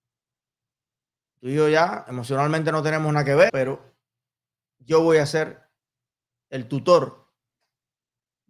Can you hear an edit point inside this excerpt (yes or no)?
yes